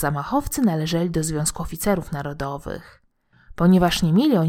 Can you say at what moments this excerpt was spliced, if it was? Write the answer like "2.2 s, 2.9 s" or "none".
3.3 s